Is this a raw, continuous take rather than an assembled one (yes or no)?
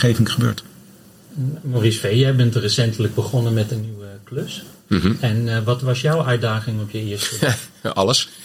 yes